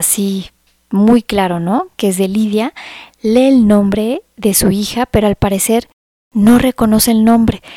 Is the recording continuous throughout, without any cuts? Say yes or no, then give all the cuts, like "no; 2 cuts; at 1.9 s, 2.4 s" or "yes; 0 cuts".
yes; 0 cuts